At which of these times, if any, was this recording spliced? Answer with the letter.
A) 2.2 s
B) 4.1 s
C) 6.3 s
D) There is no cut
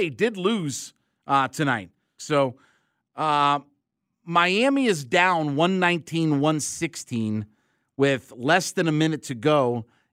A